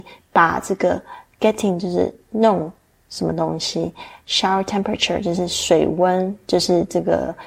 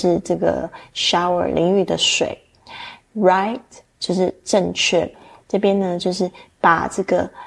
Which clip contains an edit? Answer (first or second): second